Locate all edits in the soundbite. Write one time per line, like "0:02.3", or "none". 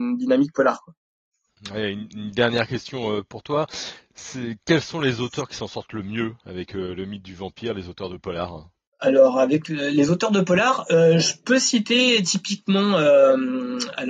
none

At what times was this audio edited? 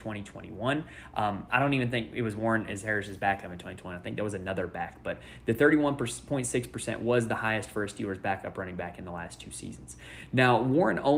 0:01.5

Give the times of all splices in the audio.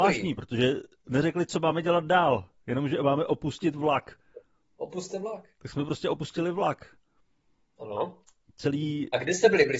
none

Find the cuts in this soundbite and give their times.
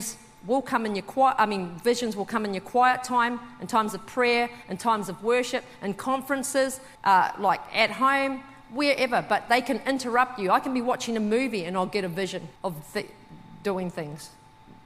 0:07.0
0:12.6

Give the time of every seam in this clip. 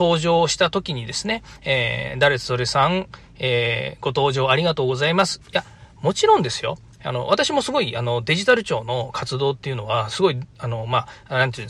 0:05.4

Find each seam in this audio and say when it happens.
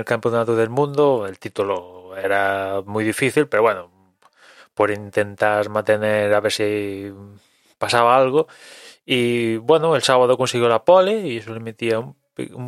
none

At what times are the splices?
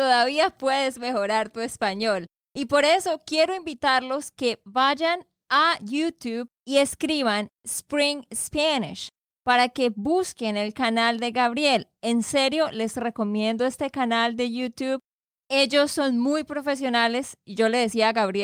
0:06.6

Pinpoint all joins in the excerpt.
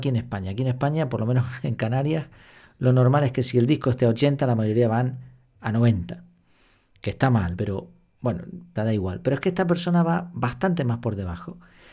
0:07.6
0:08.8

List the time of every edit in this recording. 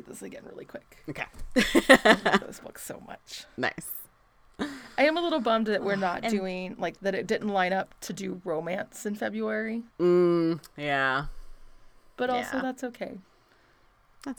0:09.9

